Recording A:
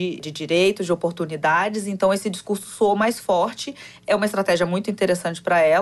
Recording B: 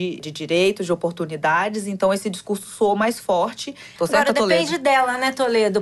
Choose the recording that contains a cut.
B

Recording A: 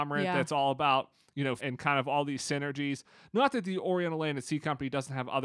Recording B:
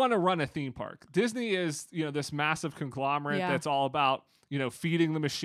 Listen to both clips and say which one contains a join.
A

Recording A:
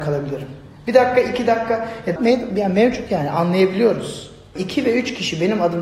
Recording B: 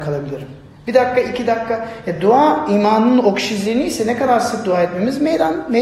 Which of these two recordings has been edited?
A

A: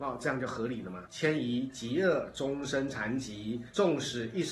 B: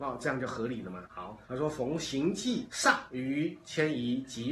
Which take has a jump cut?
A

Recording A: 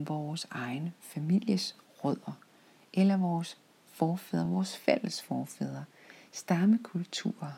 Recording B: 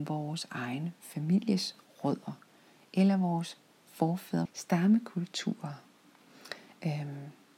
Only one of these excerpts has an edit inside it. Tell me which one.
B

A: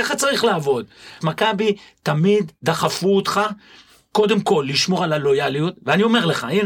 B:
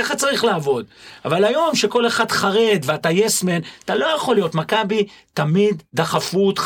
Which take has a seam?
A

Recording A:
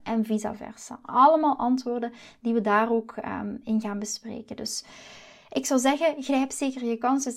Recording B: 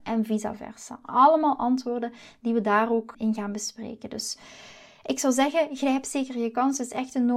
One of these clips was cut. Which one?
B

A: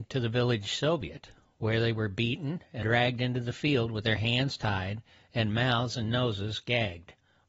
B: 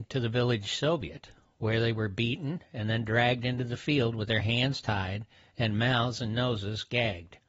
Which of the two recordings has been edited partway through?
A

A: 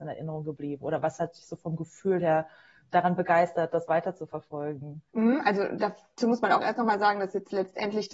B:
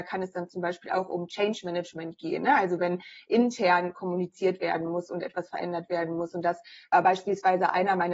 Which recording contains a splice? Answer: A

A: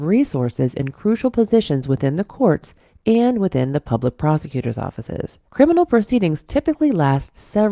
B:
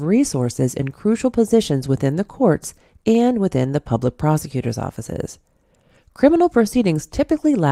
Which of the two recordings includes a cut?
A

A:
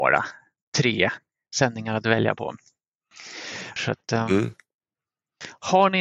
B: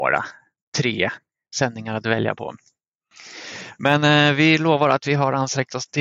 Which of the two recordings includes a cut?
A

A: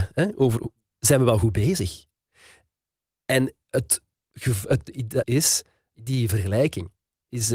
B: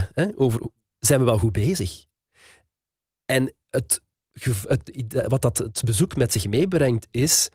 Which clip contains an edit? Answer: A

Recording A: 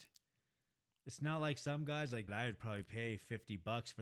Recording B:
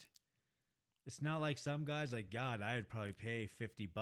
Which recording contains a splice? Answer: A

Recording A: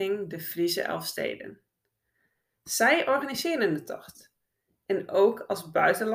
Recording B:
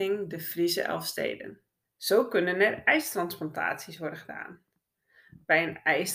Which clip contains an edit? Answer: B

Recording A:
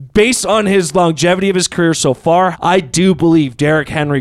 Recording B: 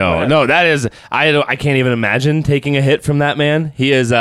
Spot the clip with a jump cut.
A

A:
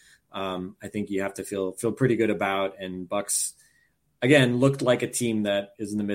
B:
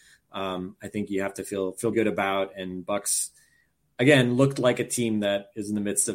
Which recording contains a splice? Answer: B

